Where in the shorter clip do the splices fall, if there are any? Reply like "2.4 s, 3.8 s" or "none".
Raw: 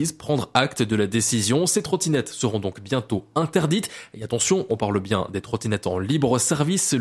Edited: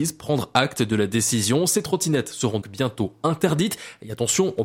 2.6 s